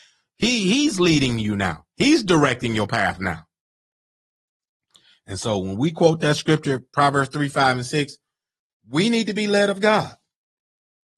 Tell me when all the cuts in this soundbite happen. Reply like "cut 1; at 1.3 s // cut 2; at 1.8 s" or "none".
none